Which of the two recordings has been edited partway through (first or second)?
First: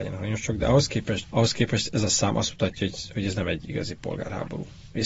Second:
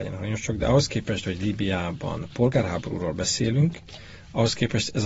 first